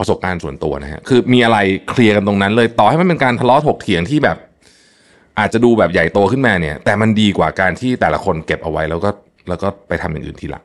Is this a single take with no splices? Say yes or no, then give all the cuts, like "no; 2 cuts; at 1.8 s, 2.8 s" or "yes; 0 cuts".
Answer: yes; 0 cuts